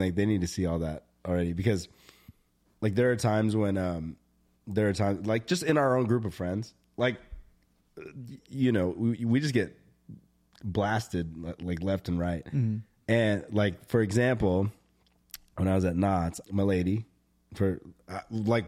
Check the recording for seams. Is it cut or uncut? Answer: cut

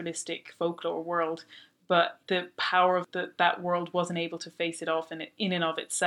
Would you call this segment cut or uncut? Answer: uncut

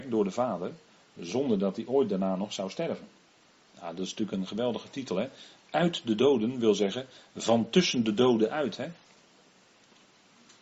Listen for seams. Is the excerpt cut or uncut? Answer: uncut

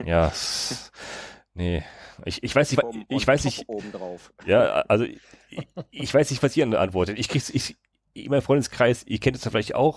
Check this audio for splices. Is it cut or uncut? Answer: uncut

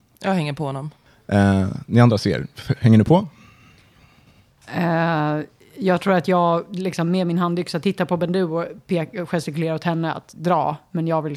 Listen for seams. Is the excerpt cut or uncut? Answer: uncut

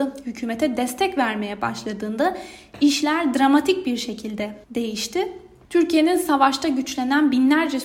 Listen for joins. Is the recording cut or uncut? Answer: cut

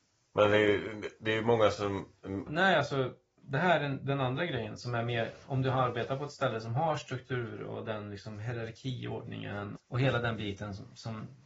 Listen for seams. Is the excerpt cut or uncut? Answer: cut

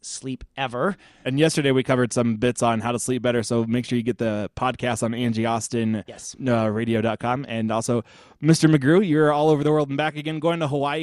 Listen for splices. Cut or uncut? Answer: uncut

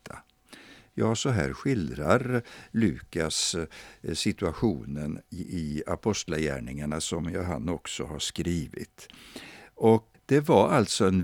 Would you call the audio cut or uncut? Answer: cut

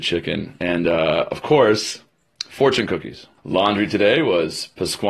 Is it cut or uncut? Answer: cut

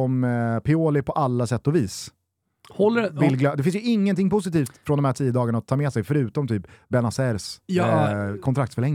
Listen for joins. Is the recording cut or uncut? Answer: uncut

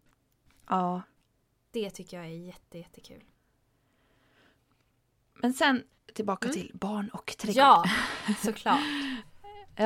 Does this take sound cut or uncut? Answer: uncut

